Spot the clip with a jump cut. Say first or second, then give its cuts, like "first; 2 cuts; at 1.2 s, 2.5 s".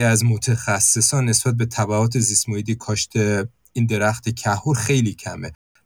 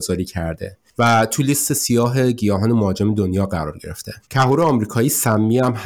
second; 1 cut; at 4.2 s